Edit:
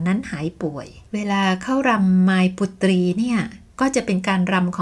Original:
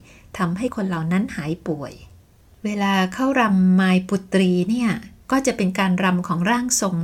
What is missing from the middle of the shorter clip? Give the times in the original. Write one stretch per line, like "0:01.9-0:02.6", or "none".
0:02.1-0:02.6

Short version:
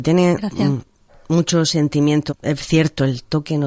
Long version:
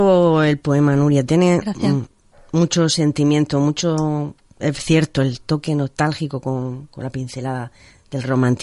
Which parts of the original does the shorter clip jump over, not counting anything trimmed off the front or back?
0:03.5-0:04.5

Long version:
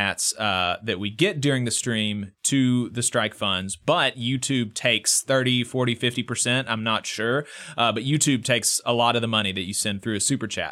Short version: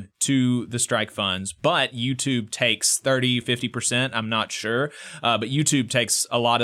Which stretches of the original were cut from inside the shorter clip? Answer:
0:05.6-0:06.0

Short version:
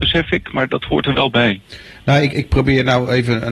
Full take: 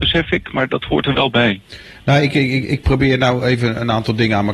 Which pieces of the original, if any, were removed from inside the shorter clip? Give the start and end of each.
0:02.3-0:02.7

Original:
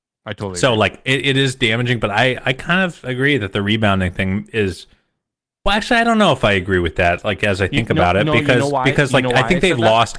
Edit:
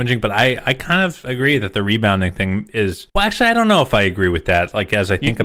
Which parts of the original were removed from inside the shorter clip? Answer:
0:04.9-0:05.6

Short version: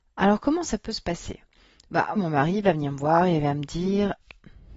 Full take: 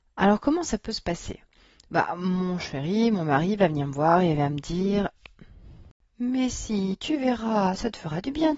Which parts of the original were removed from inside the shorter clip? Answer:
0:02.2-0:03.1

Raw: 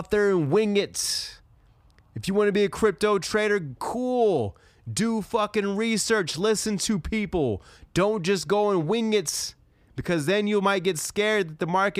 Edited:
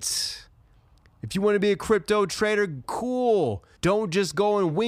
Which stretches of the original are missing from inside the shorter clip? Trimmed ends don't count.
0:04.7-0:07.9

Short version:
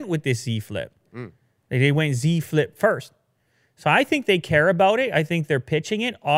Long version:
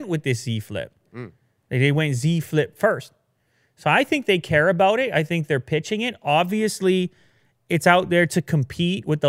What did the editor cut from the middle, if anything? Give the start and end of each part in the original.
none

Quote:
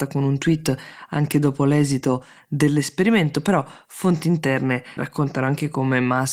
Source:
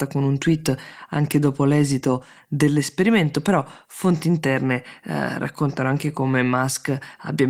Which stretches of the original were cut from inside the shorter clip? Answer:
0:05.0-0:05.4

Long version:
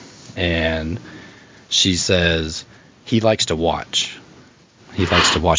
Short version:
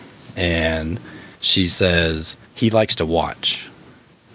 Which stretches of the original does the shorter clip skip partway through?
0:01.3-0:01.6
0:02.7-0:03.0

